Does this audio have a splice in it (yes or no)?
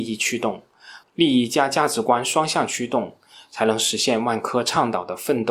yes